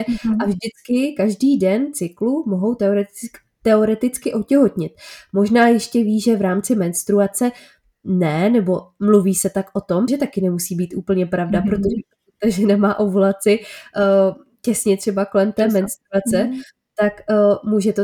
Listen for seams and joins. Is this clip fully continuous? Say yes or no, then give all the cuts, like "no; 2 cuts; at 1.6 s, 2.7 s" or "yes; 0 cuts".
no; 1 cut; at 10.1 s